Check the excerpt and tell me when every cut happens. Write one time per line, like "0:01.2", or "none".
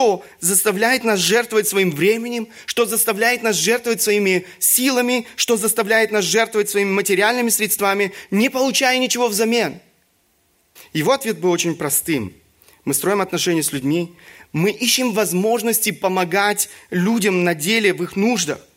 0:10.8

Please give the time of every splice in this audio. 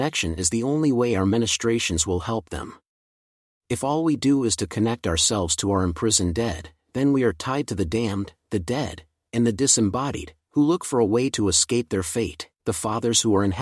0:12.6

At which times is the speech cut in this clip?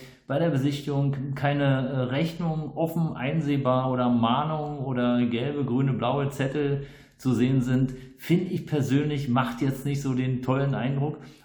none

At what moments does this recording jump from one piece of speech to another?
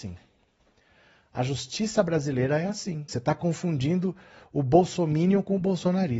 0:03.1

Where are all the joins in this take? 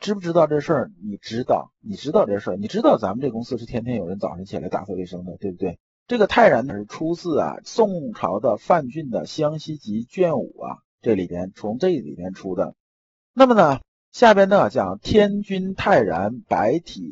0:06.0
0:13.2

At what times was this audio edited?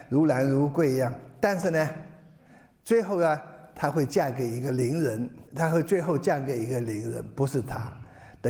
0:05.5

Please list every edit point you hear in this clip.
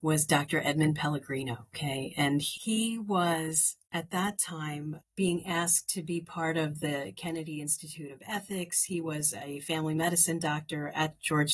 none

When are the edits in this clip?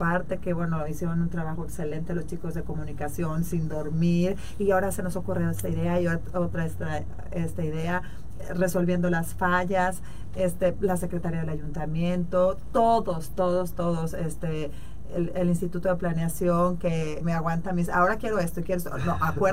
0:17.2

